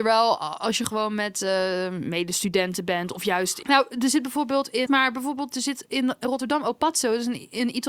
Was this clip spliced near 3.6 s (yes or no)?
yes